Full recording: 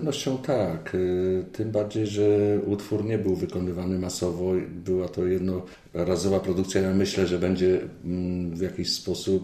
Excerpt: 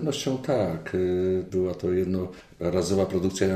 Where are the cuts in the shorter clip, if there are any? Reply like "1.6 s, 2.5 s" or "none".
1.5 s